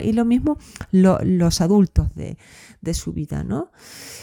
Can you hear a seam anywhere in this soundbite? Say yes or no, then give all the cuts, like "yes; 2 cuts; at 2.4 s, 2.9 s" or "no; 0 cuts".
no; 0 cuts